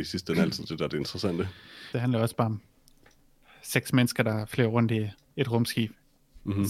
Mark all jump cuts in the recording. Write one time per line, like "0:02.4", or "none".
0:01.9

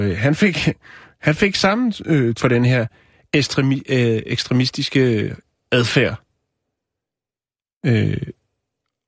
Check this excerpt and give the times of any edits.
0:02.4

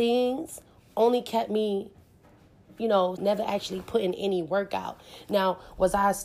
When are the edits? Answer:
0:03.2

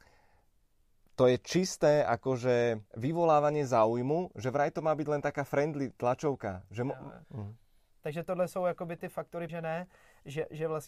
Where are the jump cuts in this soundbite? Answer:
0:02.9
0:07.2
0:09.5

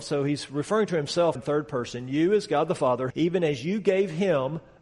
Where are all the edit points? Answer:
0:01.4
0:03.1

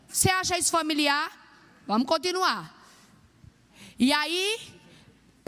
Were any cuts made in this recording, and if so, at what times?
none

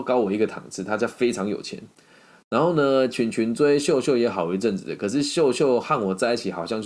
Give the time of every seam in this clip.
none

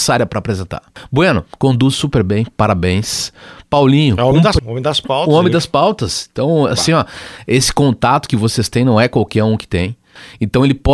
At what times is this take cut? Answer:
0:04.6

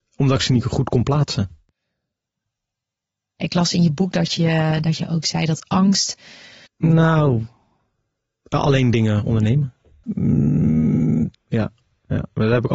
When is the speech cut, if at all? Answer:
0:06.7
0:10.0
0:11.3

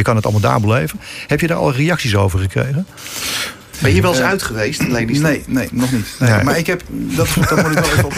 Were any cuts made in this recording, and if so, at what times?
0:03.7

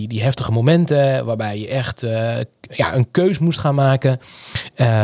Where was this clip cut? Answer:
none

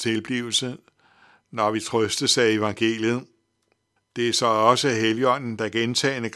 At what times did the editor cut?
0:04.0

